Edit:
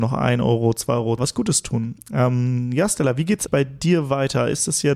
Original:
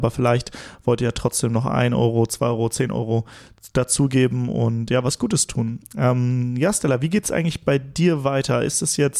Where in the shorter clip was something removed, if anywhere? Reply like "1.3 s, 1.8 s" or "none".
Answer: 1.2 s, 3.5 s